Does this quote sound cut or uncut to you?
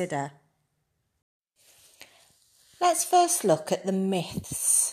uncut